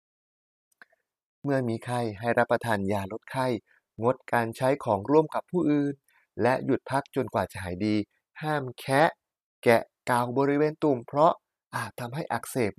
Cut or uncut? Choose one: uncut